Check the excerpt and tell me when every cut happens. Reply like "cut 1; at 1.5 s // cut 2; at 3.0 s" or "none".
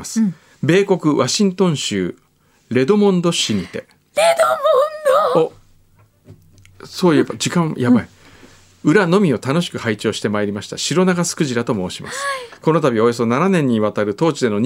none